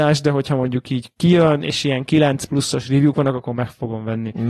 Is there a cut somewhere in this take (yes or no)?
no